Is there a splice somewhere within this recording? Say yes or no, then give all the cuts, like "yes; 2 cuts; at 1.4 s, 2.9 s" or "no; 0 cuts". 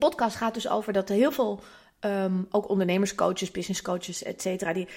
no; 0 cuts